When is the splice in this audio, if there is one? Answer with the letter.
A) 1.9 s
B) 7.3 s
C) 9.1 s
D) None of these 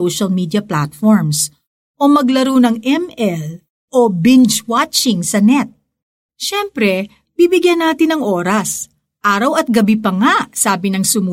B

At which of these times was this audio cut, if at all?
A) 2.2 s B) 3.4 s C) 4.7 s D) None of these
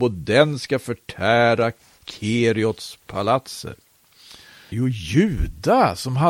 C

